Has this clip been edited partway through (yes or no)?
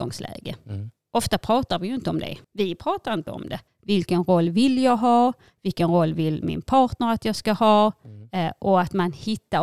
yes